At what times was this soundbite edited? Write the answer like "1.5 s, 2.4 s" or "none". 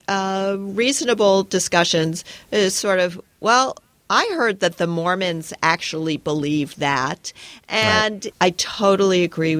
8.3 s